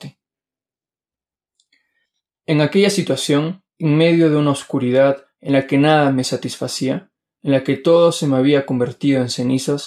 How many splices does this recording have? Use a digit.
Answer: 0